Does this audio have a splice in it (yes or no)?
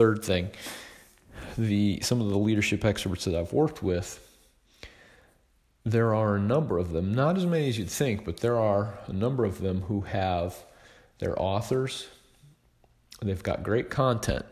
no